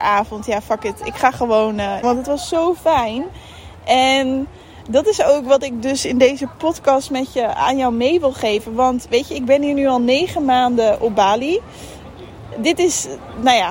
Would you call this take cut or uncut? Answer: cut